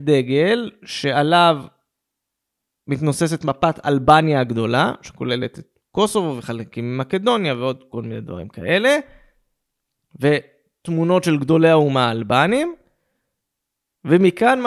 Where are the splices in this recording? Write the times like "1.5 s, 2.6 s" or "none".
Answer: none